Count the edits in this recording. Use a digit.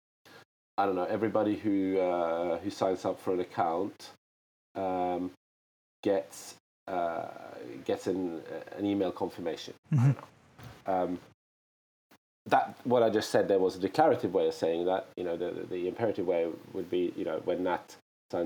1